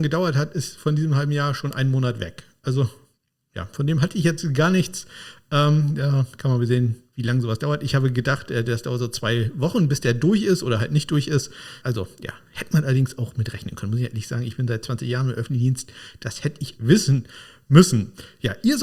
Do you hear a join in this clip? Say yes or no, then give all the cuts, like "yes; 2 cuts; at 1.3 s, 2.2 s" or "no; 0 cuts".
yes; 2 cuts; at 11.8 s, 16.8 s